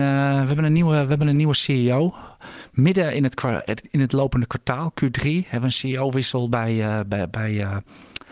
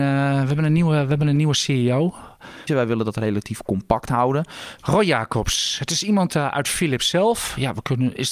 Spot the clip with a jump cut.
second; 2 cuts; at 2.7 s, 4.8 s

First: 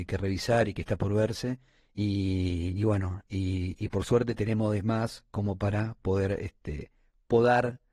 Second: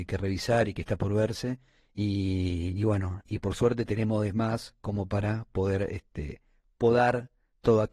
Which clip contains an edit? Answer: second; 1 cut; at 3.3 s

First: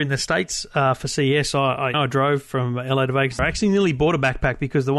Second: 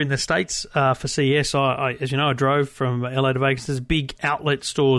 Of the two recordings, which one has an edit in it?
first; 2 cuts; at 1.9 s, 3.4 s

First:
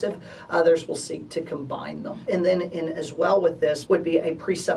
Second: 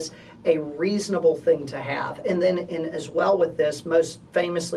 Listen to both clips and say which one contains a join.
first; 2 cuts; at 2.3 s, 3.9 s

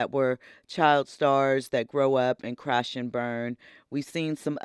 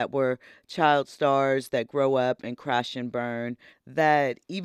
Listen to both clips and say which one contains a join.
second; 1 cut; at 3.7 s

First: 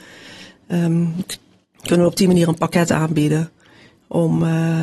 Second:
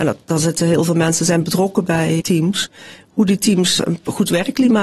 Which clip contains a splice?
second; 2 cuts; at 2.2 s, 3.8 s

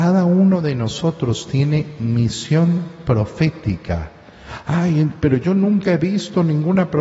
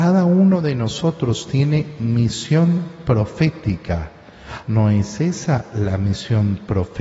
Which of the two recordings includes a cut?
second; 1 cut; at 4.6 s

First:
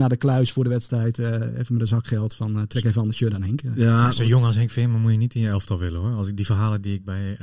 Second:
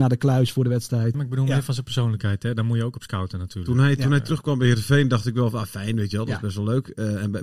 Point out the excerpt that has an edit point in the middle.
second; 1 cut; at 1.1 s

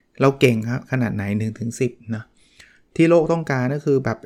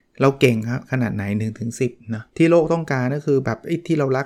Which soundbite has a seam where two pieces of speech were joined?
second; 1 cut; at 2.3 s

